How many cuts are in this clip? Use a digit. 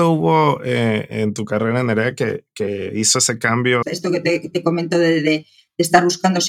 1